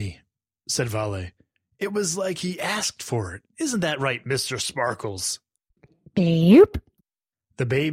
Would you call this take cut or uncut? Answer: uncut